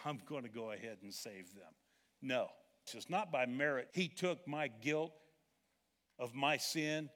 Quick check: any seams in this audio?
yes; 2 cuts; at 2.9 s, 3.9 s

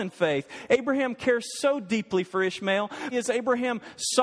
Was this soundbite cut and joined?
yes; 1 cut; at 3.1 s

